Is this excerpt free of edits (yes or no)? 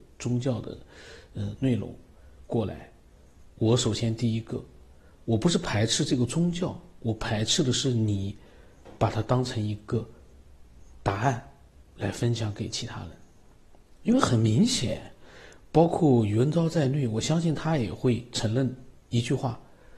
yes